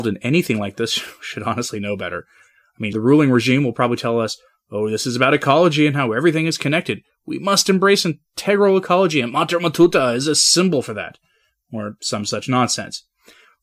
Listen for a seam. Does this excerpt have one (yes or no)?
yes